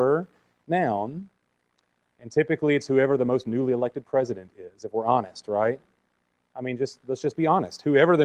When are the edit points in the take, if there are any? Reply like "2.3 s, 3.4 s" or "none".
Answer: 2.1 s